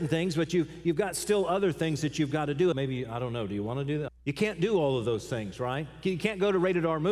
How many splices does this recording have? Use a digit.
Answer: 2